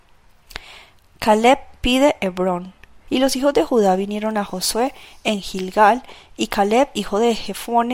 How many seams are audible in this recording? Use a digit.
1